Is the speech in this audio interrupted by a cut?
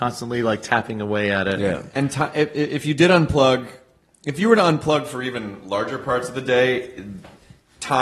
no; 0 cuts

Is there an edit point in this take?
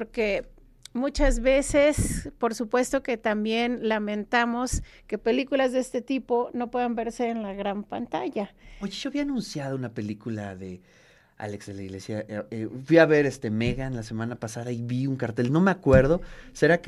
no; 0 cuts

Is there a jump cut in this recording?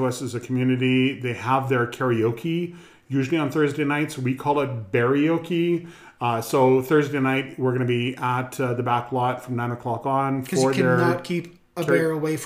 no; 0 cuts

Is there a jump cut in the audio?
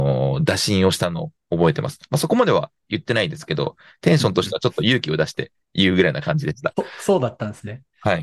no; 0 cuts

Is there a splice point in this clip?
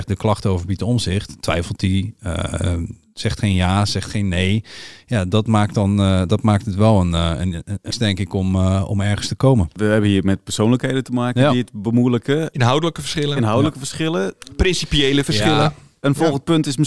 yes; 1 cut; at 7.9 s

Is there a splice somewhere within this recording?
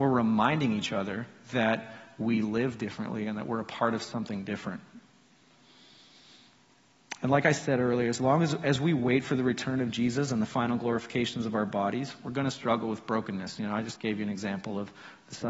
no; 0 cuts

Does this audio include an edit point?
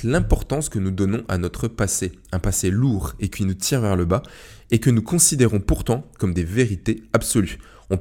no; 0 cuts

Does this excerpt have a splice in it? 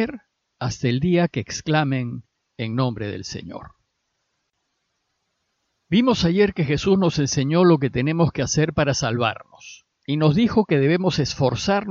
yes; 1 cut; at 2.4 s

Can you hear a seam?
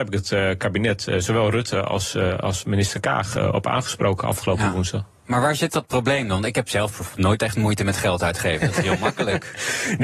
no; 0 cuts

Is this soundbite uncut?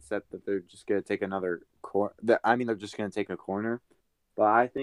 yes; 0 cuts

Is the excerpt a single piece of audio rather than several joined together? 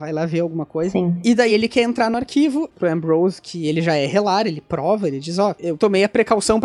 no; 1 cut; at 2.7 s

